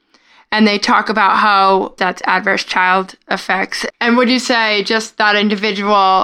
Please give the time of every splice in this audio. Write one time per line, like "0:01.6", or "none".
0:02.0
0:03.9